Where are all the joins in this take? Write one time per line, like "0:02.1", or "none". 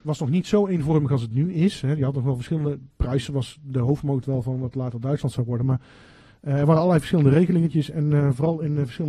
none